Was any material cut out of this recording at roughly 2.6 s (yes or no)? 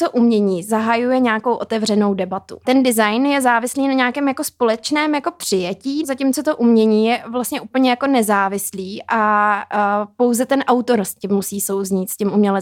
yes